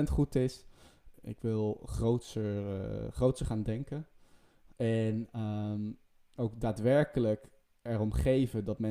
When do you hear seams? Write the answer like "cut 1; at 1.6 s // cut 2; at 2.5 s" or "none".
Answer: cut 1; at 1.1 s // cut 2; at 4.7 s

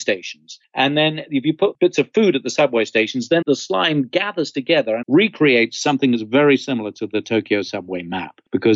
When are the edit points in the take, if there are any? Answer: cut 1; at 3.4 s // cut 2; at 5.0 s

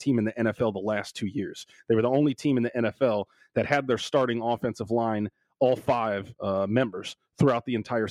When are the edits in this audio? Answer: none

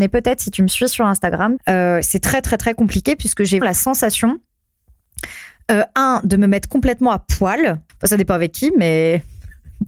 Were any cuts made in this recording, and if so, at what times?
cut 1; at 1.6 s // cut 2; at 3.6 s // cut 3; at 7.9 s

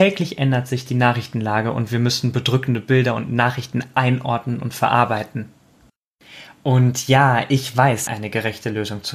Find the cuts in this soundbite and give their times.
cut 1; at 8.1 s

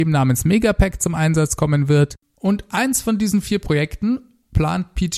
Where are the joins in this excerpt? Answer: cut 1; at 2.2 s

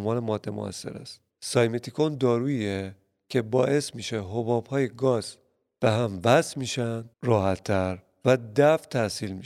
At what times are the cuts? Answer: cut 1; at 1.3 s // cut 2; at 7.1 s

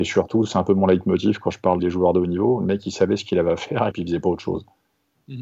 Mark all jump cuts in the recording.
cut 1; at 1.8 s // cut 2; at 3.9 s

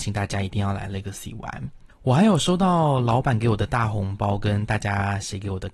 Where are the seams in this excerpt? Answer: cut 1; at 1.9 s

